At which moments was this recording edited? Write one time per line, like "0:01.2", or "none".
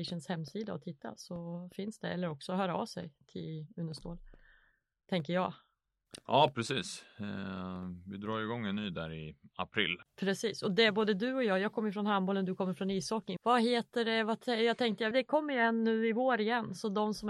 0:13.4
0:15.1